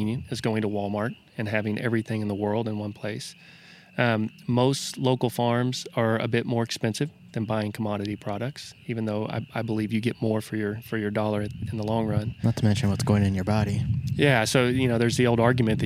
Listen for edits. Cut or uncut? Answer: uncut